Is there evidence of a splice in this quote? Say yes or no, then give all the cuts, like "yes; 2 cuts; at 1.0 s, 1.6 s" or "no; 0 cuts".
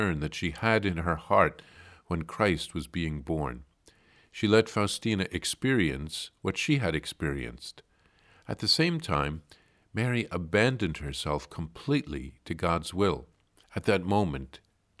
yes; 1 cut; at 13.6 s